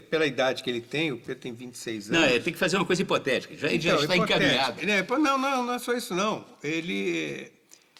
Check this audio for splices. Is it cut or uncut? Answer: uncut